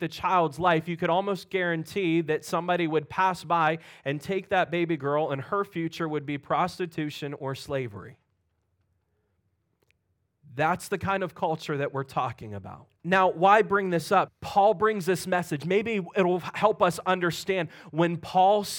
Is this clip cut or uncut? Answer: cut